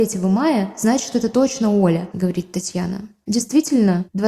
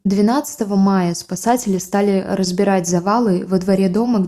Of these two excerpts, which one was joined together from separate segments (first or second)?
first